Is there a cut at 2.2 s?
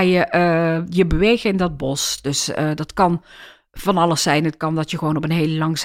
no; 0 cuts

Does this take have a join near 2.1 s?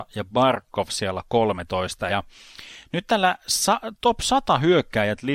yes; 1 cut; at 2.1 s

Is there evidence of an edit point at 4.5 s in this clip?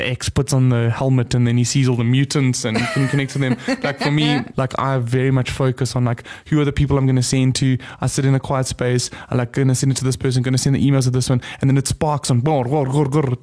yes; 1 cut; at 4.5 s

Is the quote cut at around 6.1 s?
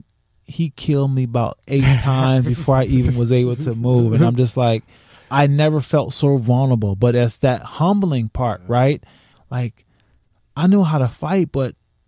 no; 1 cut; at 9.3 s

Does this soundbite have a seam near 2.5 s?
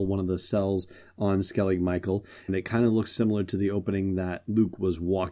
yes; 1 cut; at 2.5 s

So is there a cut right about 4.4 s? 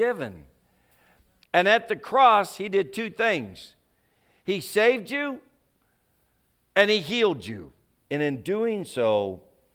no; 2 cuts; at 1.4 s, 8.0 s

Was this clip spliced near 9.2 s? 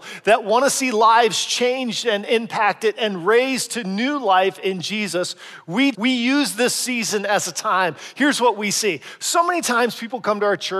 no; 1 cut; at 5.9 s

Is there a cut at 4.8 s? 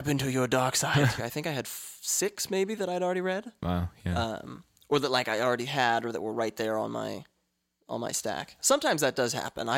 no; 2 cuts; at 1.2 s, 8.6 s

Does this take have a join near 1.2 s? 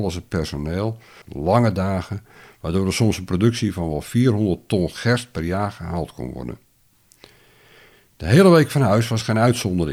yes; 1 cut; at 1.2 s

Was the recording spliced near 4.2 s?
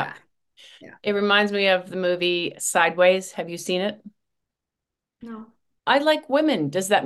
no; 1 cut; at 5.8 s

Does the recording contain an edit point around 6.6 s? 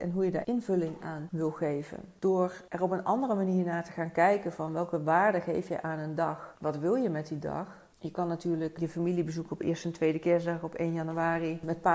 yes; 1 cut; at 6.6 s

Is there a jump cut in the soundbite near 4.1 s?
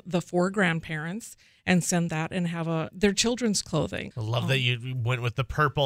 yes; 2 cuts; at 2.9 s, 4.1 s

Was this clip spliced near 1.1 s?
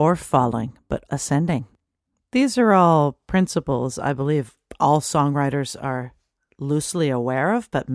yes; 1 cut; at 1.1 s

